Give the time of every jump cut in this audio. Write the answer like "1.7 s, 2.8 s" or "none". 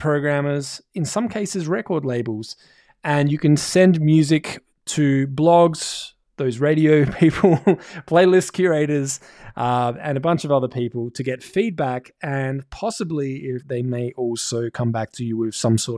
13.6 s